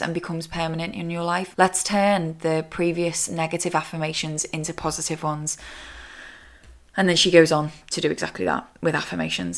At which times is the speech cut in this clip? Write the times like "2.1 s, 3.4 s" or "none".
1.5 s